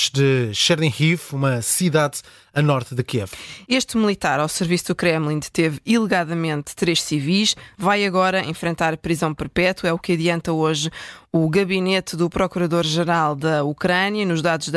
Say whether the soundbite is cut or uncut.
cut